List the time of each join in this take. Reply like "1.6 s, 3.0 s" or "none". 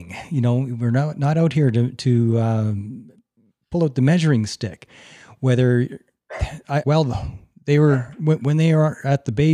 6.8 s